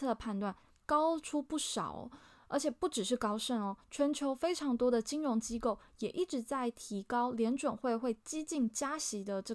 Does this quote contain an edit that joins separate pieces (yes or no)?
no